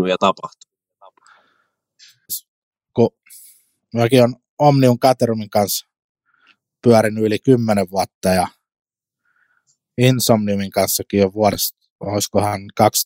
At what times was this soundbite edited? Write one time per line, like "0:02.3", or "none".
0:02.3